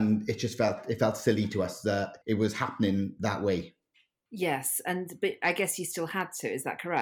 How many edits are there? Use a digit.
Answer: 1